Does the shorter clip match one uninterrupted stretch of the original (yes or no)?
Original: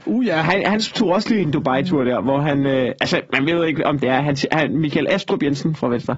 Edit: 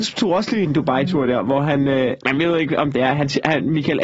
no